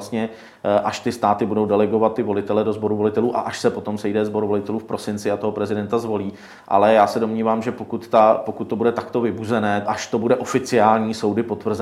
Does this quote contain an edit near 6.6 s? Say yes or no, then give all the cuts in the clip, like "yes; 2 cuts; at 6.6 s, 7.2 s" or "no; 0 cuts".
no; 1 cut; at 9.9 s